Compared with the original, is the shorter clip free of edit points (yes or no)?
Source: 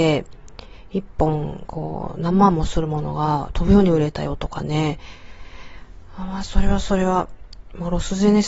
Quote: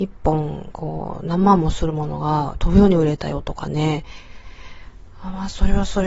yes